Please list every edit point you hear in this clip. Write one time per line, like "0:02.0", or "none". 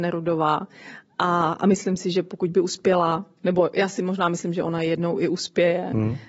none